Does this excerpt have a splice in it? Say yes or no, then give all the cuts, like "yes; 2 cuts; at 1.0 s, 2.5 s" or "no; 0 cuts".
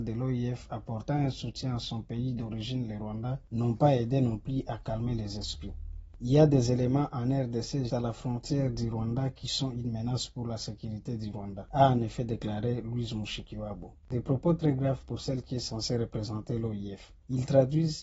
yes; 1 cut; at 7.9 s